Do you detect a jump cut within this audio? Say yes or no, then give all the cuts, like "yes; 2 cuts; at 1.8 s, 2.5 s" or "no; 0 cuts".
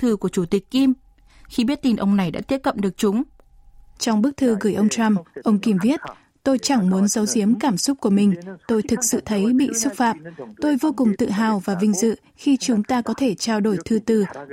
yes; 1 cut; at 4.0 s